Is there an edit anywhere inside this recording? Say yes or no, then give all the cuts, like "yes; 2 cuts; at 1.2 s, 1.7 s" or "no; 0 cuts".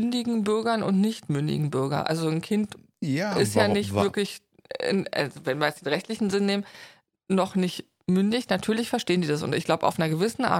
no; 0 cuts